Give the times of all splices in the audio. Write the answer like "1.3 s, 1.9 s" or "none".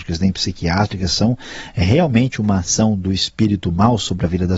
none